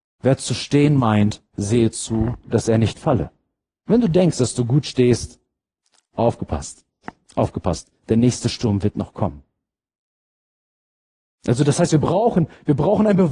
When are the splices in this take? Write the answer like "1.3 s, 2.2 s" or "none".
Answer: none